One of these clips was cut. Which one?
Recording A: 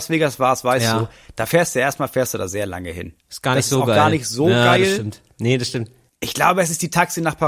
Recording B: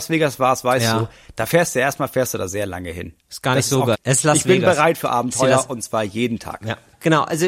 B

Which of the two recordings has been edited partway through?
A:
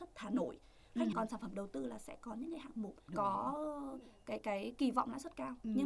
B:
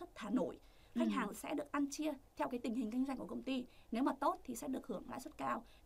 A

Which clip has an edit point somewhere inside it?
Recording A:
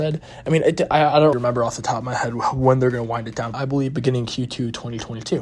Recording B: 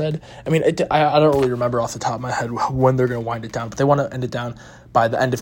A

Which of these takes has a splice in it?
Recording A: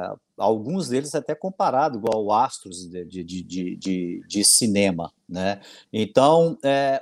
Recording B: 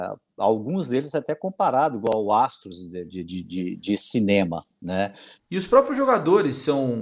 B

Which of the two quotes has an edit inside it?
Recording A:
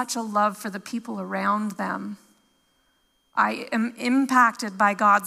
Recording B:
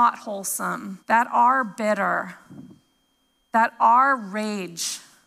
B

